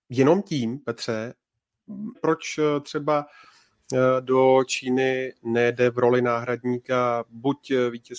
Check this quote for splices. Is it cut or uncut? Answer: cut